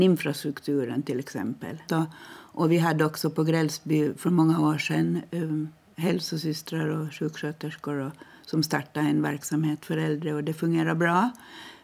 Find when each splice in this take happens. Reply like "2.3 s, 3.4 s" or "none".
1.8 s